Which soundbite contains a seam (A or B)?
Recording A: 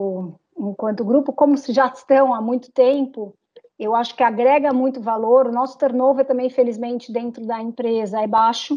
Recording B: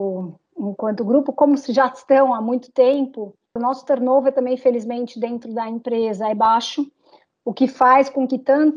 B